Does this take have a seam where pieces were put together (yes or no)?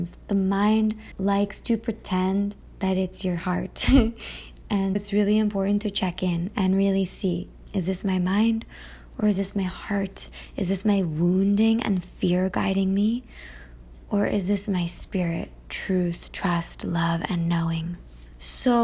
yes